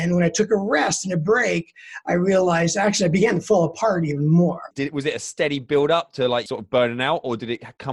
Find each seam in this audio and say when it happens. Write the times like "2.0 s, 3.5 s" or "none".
4.7 s, 6.5 s